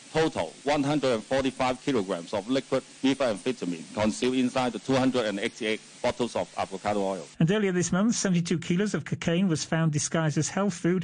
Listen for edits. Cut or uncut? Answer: uncut